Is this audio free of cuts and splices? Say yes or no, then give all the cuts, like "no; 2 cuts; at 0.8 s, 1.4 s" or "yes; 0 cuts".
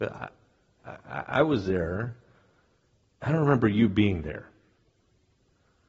yes; 0 cuts